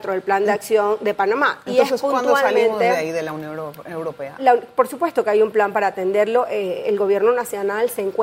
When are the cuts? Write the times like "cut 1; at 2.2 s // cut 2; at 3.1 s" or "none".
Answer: cut 1; at 4.4 s